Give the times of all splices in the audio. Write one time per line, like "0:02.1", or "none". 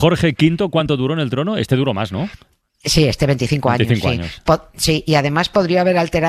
none